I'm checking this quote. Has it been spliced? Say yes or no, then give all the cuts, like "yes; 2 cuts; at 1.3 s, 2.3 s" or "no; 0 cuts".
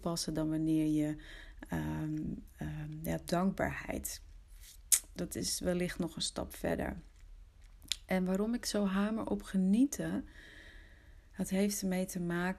no; 0 cuts